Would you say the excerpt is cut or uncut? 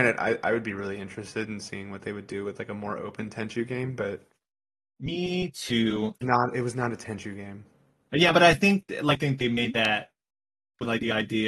cut